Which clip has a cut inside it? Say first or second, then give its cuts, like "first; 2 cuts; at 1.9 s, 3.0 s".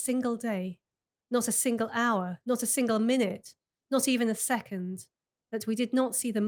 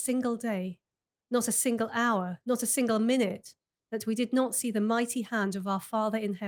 second; 1 cut; at 3.8 s